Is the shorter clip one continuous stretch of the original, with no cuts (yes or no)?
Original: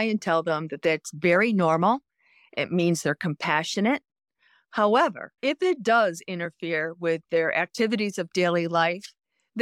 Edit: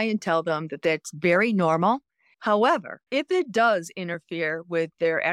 no